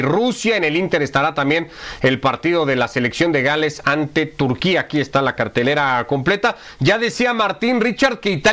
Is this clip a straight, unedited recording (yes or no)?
yes